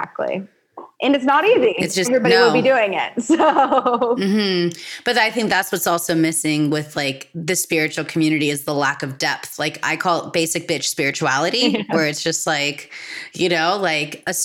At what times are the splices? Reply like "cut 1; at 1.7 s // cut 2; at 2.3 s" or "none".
cut 1; at 0.9 s // cut 2; at 2.0 s